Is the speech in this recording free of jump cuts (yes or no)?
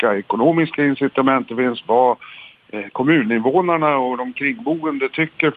yes